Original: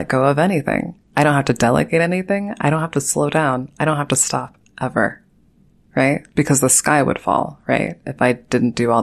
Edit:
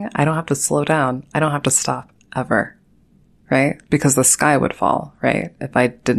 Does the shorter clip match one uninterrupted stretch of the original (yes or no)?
yes